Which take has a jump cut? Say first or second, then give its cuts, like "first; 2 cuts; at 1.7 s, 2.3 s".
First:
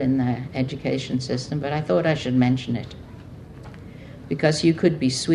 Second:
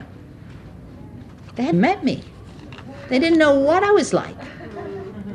second; 1 cut; at 1.7 s